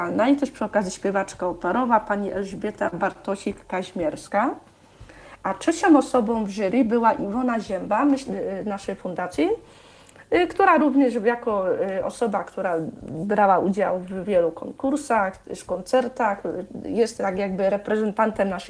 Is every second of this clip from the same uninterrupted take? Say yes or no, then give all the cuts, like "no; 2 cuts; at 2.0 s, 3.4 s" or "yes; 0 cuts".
yes; 0 cuts